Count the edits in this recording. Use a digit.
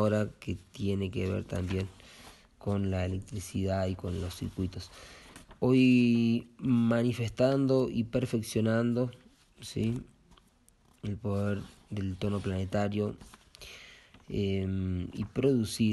0